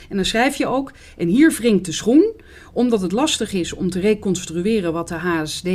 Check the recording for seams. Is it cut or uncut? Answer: uncut